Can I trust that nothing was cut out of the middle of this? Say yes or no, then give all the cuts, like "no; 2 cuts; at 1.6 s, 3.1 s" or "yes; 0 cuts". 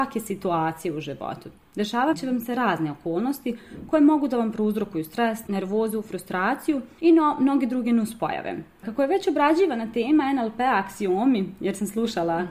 yes; 0 cuts